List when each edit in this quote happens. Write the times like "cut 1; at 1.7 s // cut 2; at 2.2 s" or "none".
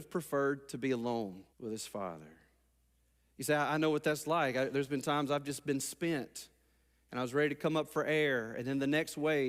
cut 1; at 1.5 s